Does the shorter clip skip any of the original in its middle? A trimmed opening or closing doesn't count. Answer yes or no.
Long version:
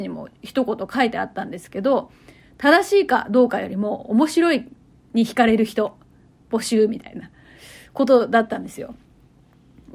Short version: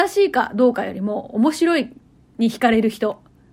no